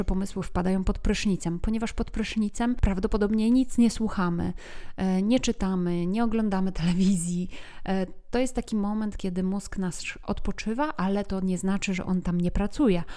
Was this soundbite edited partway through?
no; 0 cuts

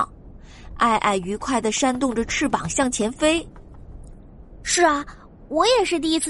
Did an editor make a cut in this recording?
no; 0 cuts

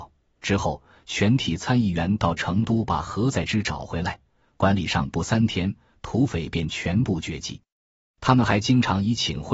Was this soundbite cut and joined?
yes; 1 cut; at 8.1 s

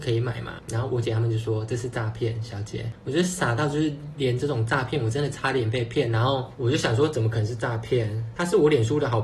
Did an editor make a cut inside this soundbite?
no; 0 cuts

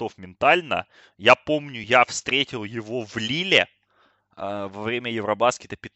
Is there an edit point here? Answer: no; 0 cuts

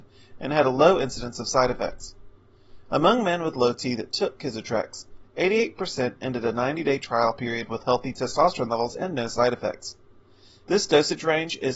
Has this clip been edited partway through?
yes; 1 cut; at 10.6 s

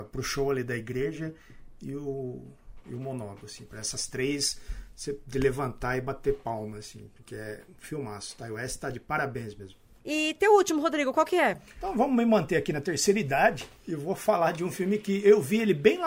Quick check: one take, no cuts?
yes; 0 cuts

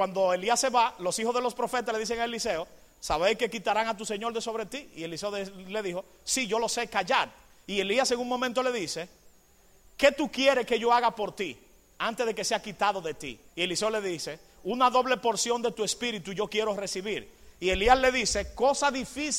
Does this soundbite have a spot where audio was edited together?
yes; 1 cut; at 13.5 s

